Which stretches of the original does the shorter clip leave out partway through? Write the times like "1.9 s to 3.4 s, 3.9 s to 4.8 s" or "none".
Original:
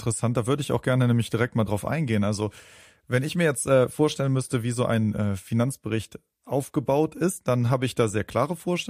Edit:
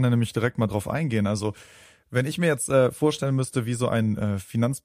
none